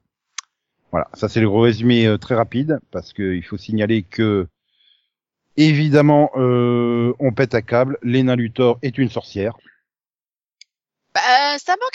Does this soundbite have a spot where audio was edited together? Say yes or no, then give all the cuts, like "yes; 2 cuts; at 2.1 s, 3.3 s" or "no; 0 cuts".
no; 0 cuts